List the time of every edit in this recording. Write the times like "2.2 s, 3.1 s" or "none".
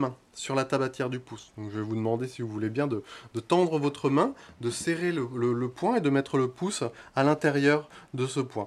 none